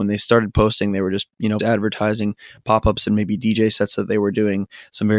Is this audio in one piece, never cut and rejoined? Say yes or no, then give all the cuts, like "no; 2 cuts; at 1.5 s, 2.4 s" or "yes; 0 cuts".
no; 1 cut; at 1.6 s